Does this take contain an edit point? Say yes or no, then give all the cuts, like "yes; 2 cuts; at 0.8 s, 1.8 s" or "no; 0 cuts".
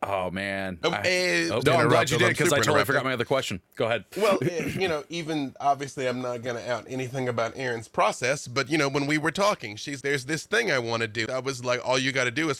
yes; 3 cuts; at 1.6 s, 10.0 s, 11.3 s